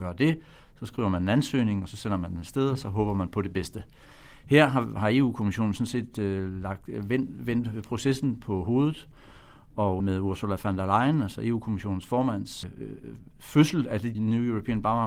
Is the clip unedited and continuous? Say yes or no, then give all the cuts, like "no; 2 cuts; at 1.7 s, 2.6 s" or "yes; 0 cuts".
no; 3 cuts; at 10.0 s, 12.6 s, 14.1 s